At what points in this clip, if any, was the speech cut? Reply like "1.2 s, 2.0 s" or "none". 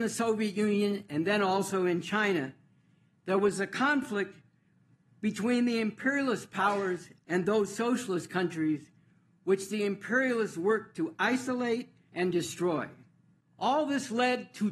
12.1 s